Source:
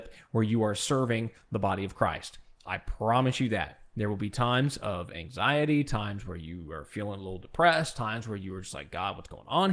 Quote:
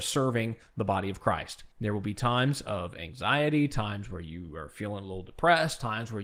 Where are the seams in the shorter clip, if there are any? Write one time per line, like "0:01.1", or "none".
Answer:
0:01.7